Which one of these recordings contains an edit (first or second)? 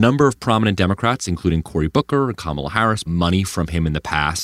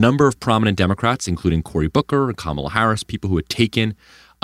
first